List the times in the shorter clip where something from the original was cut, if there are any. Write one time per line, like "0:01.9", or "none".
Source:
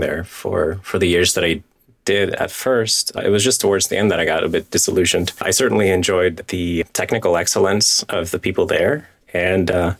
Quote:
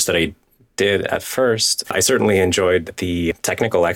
0:01.8